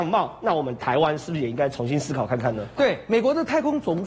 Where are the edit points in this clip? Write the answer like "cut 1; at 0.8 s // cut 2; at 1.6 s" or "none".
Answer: cut 1; at 2.8 s